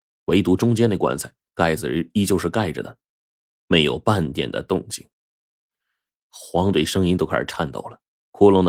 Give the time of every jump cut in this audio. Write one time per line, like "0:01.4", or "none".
0:06.3